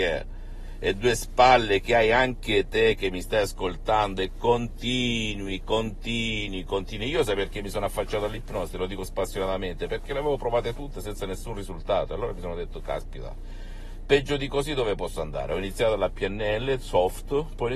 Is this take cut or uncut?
uncut